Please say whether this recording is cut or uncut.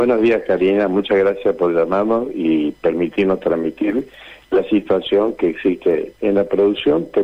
uncut